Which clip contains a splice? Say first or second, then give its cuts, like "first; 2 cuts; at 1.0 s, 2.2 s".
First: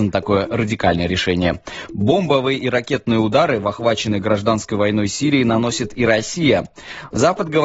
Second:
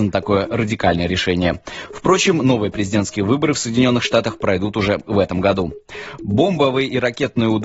first; 1 cut; at 1.9 s